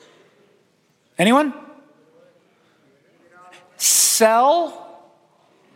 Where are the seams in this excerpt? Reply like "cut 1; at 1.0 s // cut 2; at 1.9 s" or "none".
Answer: none